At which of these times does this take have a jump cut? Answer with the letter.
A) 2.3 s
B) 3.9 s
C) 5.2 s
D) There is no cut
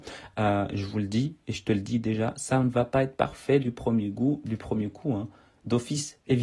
D